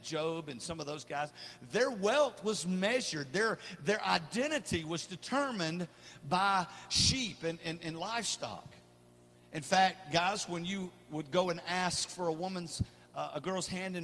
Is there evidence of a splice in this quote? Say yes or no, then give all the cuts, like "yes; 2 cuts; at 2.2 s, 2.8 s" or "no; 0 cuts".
no; 0 cuts